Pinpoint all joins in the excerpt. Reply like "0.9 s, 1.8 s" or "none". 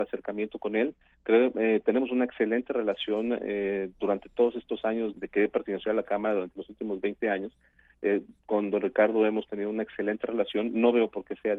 5.1 s